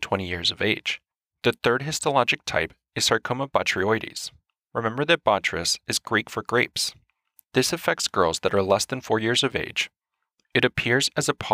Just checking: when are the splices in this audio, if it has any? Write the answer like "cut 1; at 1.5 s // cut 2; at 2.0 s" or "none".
none